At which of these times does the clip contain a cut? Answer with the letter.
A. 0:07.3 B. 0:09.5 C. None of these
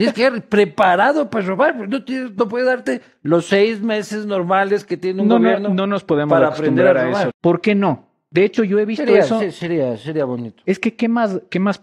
A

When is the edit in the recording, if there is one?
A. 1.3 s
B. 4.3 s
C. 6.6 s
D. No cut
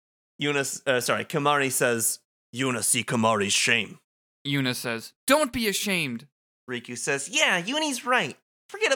D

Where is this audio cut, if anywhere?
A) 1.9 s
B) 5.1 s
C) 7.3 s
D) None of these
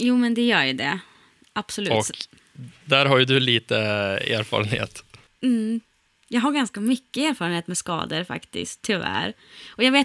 D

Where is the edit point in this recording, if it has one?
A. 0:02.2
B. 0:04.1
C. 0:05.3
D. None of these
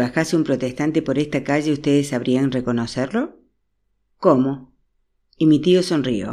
B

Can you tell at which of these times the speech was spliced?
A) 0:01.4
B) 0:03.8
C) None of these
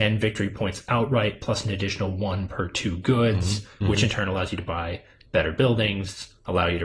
B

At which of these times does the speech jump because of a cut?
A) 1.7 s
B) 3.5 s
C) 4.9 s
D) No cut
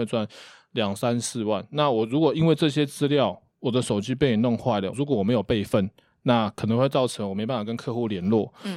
C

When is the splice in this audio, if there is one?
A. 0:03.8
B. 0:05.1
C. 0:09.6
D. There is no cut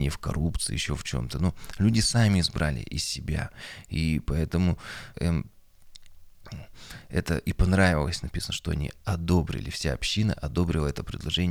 B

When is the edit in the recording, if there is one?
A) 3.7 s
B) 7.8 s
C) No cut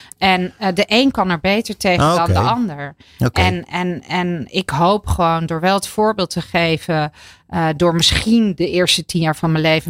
C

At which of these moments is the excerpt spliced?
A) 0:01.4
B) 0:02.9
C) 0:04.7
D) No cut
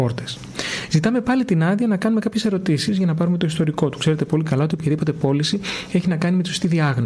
B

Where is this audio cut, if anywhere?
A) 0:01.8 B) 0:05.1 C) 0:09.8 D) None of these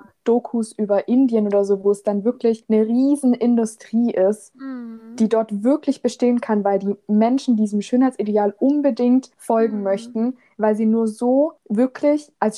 D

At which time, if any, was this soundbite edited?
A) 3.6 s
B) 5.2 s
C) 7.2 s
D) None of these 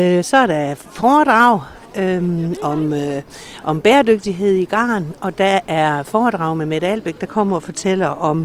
D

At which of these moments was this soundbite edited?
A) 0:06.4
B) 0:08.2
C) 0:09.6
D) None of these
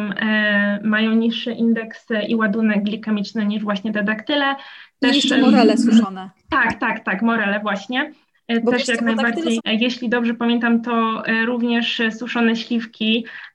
C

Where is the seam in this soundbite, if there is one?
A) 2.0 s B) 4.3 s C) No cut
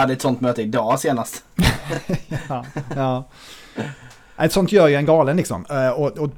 C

